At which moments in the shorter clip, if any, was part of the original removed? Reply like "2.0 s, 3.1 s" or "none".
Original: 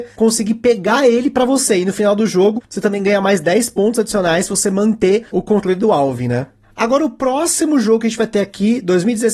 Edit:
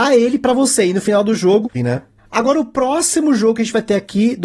1.7 s